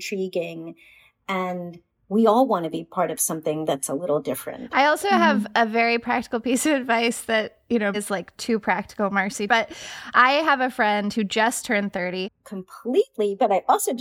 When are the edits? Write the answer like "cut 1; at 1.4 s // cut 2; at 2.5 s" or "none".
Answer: cut 1; at 7.9 s // cut 2; at 9.5 s // cut 3; at 12.2 s